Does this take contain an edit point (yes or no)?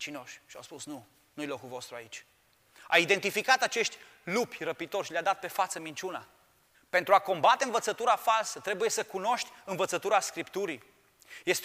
yes